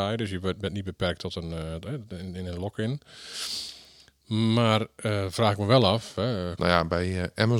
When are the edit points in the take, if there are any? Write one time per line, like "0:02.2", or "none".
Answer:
0:06.6